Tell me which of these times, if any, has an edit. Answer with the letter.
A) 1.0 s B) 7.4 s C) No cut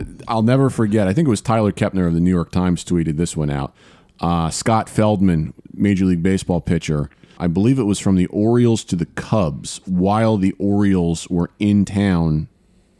B